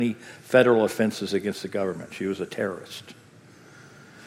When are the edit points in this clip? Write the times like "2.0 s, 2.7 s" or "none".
none

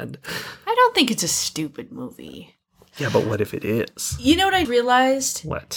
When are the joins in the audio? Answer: 4.6 s

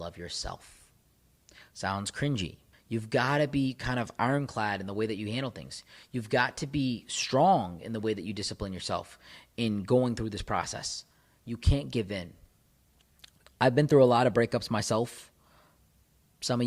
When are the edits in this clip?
2.7 s

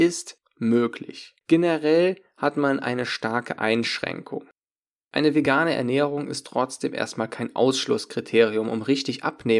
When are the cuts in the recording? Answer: 1.4 s

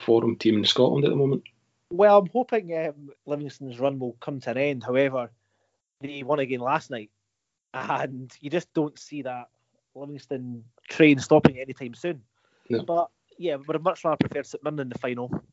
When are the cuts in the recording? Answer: 3.2 s

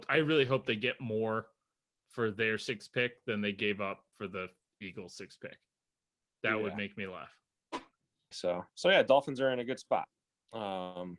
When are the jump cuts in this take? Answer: 8.3 s

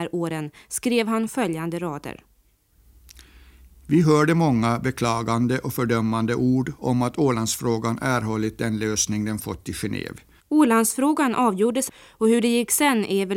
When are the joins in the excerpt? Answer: 10.4 s

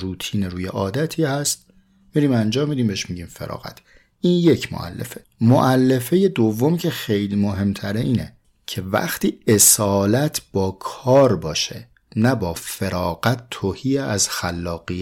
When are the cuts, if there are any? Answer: 12.5 s

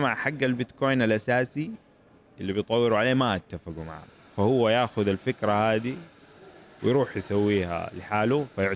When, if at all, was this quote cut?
none

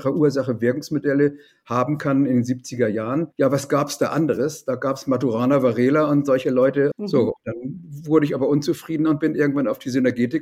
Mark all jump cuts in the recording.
3.3 s, 6.9 s

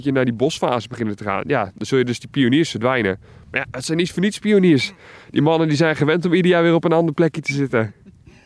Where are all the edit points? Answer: none

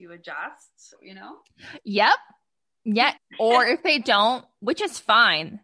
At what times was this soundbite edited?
0.9 s, 3.2 s

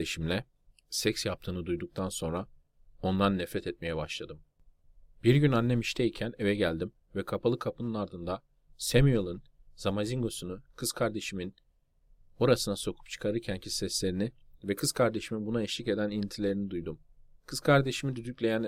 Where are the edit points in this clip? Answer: 17.4 s

